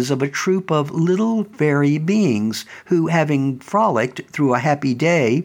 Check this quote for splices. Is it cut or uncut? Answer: uncut